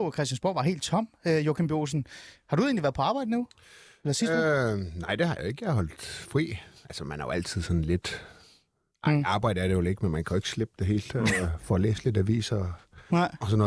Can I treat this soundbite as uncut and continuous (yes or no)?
yes